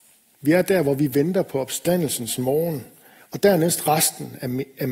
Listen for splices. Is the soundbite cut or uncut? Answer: cut